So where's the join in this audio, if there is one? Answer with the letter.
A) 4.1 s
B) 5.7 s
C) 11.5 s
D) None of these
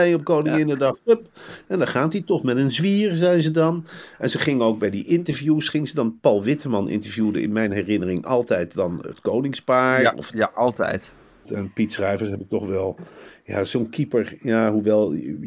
C